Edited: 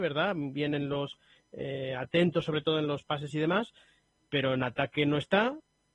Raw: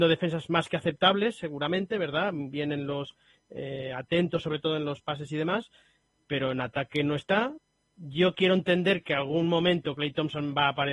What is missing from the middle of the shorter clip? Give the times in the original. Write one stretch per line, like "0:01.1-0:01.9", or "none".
none